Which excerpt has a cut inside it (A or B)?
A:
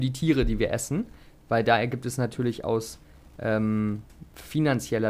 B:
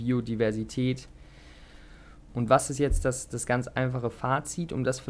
B